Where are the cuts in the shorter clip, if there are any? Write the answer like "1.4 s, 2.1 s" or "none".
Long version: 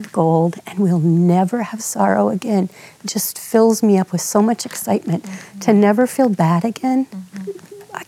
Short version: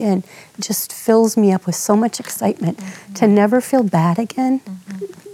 none